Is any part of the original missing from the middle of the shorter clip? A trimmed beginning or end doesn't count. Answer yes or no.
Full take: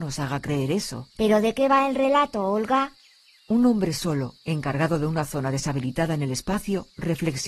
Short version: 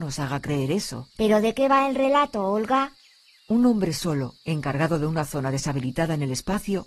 no